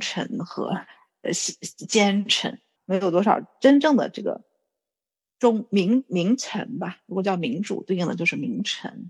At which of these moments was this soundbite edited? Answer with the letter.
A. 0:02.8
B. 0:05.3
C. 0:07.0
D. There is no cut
A